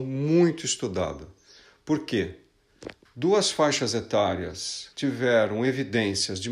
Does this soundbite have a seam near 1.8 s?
no; 2 cuts; at 3.1 s, 4.9 s

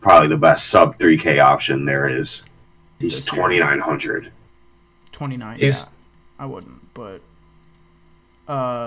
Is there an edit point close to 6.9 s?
no; 1 cut; at 3.0 s

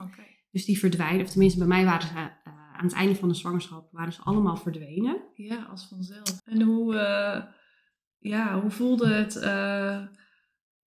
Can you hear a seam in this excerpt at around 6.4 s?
yes; 1 cut; at 6.4 s

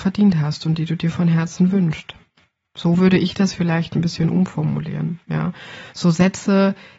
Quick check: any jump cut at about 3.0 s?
yes; 2 cuts; at 3.0 s, 5.9 s

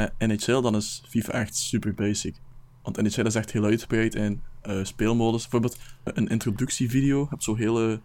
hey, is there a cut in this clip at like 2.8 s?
no; 1 cut; at 6.1 s

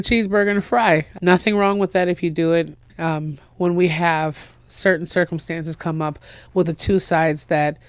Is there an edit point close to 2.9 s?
yes; 2 cuts; at 1.2 s, 2.9 s

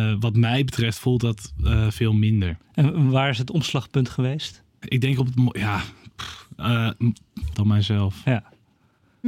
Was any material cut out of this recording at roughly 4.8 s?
yes; 2 cuts; at 4.8 s, 7.5 s

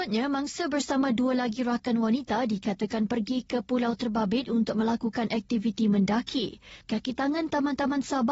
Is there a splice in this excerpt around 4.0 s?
no; 1 cut; at 6.8 s

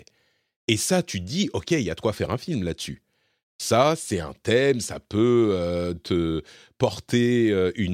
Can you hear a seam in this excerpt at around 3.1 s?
no; 1 cut; at 5.9 s

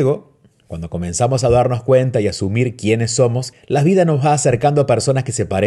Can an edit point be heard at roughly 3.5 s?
yes; 1 cut; at 3.5 s

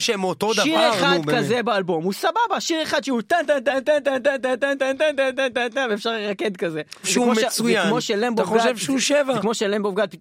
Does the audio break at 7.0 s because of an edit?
yes; 2 cuts; at 4.8 s, 7.0 s

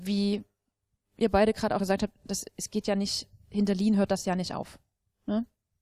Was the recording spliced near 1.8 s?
yes; 1 cut; at 1.8 s

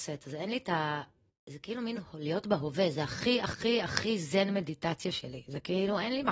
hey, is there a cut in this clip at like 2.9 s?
no; 0 cuts

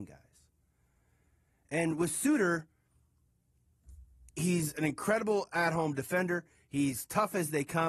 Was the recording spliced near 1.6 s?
no; 1 cut; at 4.3 s

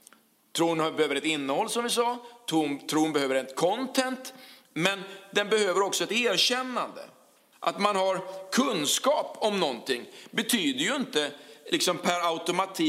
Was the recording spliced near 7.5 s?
yes; 1 cut; at 7.5 s

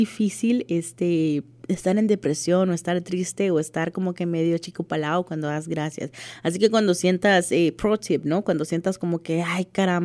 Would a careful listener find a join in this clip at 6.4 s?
no; 0 cuts

